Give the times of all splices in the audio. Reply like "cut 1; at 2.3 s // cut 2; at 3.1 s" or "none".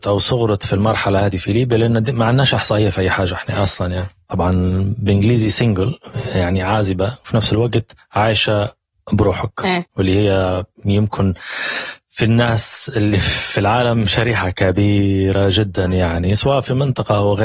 none

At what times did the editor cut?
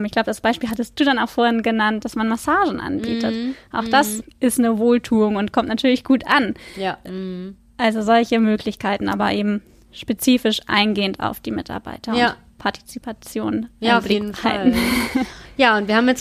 none

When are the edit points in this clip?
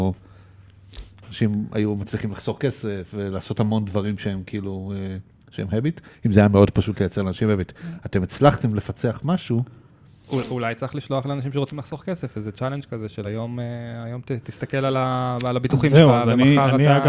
none

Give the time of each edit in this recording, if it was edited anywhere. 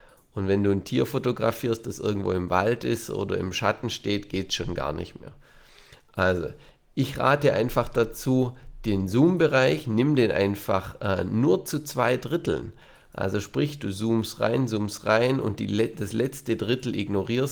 none

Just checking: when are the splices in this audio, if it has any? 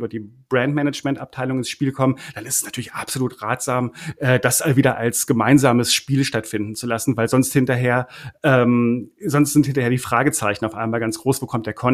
none

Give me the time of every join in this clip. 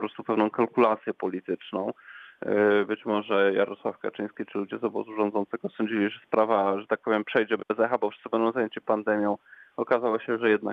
none

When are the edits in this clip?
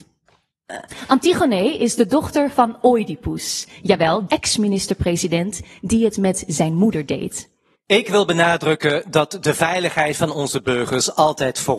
cut 1; at 4.3 s // cut 2; at 7.7 s

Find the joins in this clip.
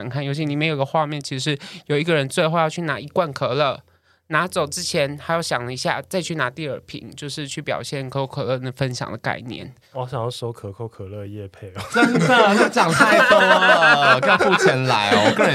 cut 1; at 9.9 s

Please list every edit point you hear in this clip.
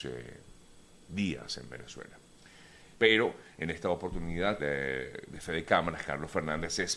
cut 1; at 2.9 s // cut 2; at 4.6 s

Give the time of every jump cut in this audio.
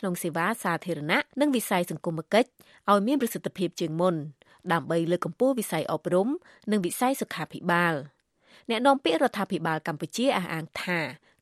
cut 1; at 1.3 s

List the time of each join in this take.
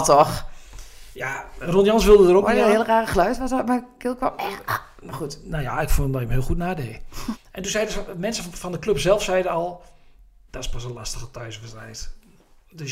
cut 1; at 7.3 s // cut 2; at 10.5 s

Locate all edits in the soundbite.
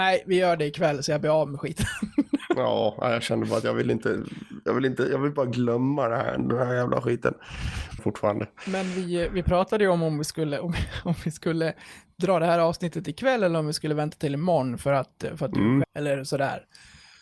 cut 1; at 8.0 s // cut 2; at 15.8 s

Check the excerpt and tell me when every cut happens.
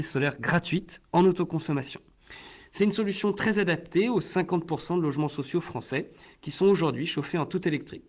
cut 1; at 2.7 s

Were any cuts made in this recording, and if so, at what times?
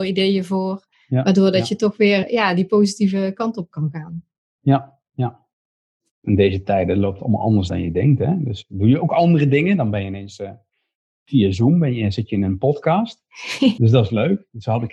none

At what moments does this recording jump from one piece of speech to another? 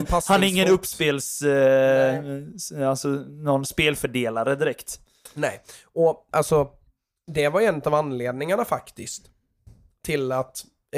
cut 1; at 6.3 s

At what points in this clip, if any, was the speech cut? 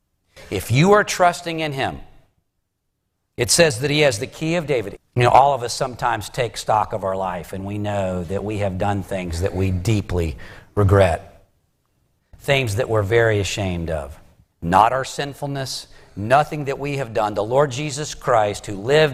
cut 1; at 5.0 s // cut 2; at 12.2 s // cut 3; at 14.5 s

